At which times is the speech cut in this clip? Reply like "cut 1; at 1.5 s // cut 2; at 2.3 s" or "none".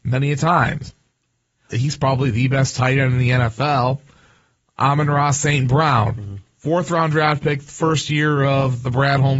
cut 1; at 1.7 s